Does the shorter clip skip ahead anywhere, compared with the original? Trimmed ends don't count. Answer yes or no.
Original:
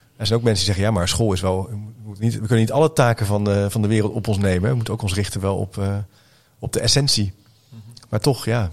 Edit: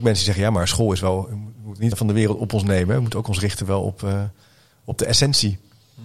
yes